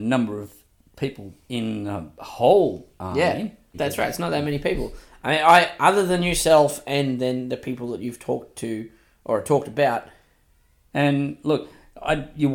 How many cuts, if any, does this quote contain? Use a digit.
2